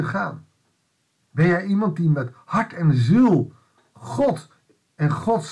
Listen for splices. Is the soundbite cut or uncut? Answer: uncut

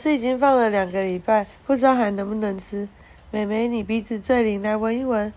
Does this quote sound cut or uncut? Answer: cut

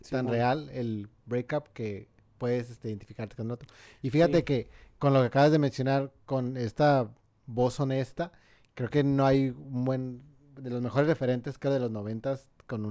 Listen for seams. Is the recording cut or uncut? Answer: uncut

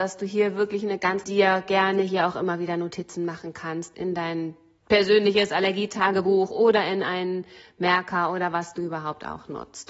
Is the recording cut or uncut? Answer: cut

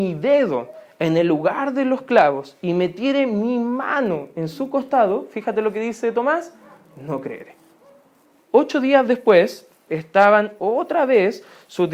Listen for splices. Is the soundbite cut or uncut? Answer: cut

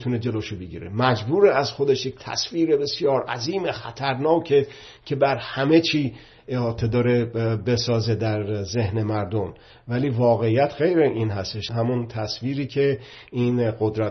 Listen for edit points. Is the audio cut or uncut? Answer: cut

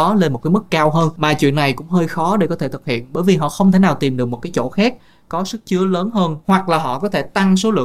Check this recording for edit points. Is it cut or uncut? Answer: uncut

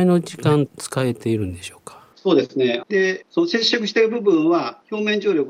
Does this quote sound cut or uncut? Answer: cut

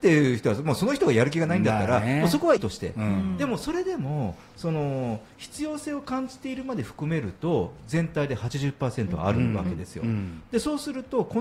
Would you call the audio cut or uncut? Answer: cut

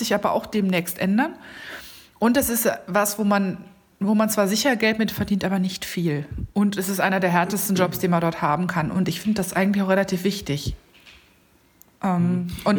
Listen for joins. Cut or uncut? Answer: cut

